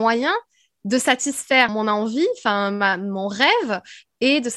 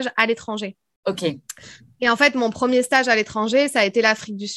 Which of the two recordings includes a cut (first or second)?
first